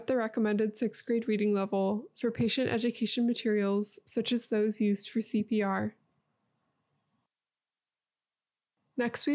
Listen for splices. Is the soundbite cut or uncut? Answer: uncut